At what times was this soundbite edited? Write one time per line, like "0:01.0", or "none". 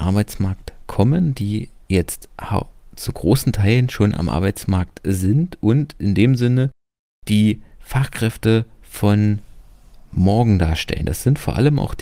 none